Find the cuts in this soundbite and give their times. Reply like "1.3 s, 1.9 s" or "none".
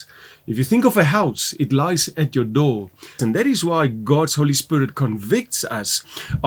3.2 s